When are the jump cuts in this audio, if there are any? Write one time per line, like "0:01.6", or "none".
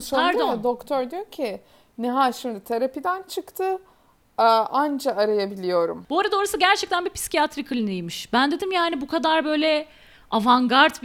none